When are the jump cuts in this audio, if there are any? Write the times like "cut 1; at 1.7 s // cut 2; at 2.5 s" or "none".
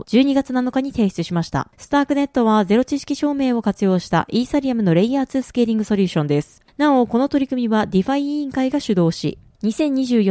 cut 1; at 1.7 s // cut 2; at 6.6 s